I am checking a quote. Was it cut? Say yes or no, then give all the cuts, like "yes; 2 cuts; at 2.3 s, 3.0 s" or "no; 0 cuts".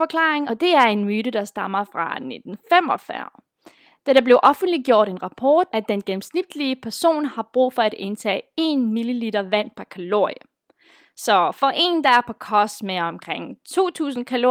yes; 1 cut; at 5.7 s